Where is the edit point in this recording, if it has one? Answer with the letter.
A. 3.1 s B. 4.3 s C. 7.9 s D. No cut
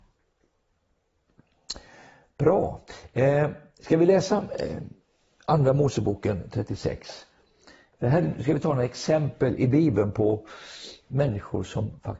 D